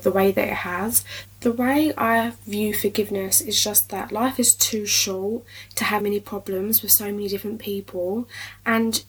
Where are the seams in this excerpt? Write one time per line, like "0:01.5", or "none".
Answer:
0:01.2
0:06.0